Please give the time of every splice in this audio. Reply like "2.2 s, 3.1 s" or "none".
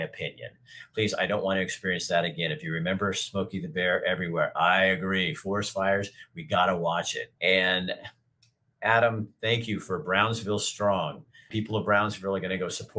7.4 s, 11.5 s